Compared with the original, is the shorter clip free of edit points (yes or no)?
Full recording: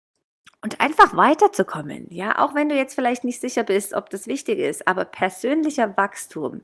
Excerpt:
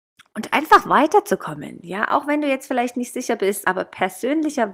no